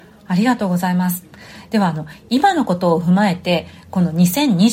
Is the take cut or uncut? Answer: uncut